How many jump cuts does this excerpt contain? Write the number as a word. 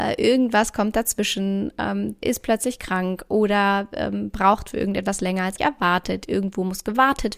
two